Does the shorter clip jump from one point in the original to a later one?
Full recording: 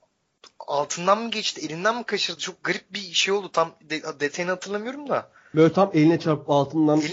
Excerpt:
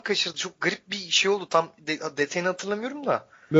no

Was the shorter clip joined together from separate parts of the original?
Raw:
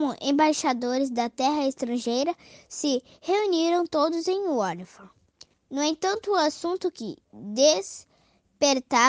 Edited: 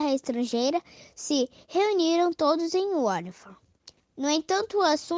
no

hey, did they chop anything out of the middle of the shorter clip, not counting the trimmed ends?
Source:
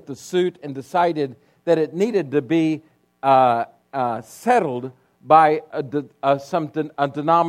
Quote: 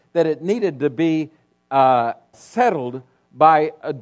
yes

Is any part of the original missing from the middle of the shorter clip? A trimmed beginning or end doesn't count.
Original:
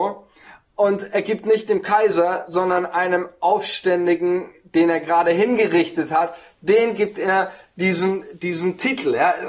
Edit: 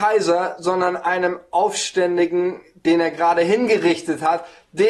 no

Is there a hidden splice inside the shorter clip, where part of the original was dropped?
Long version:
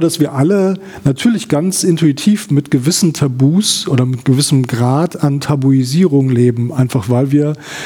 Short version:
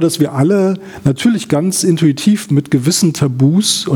no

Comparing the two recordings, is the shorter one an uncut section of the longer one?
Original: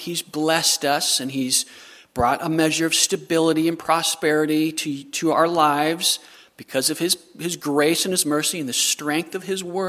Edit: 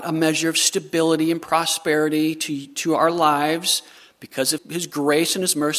no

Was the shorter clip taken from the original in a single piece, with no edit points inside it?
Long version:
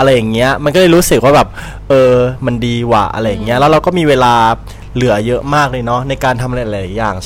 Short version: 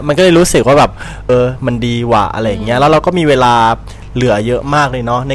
no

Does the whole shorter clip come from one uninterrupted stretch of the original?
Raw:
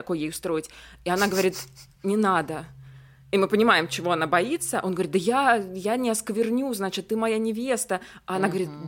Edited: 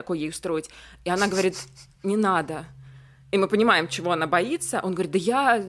yes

